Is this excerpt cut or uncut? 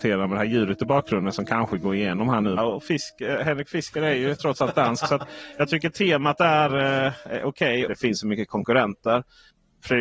cut